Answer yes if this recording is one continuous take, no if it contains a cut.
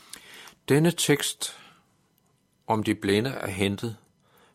yes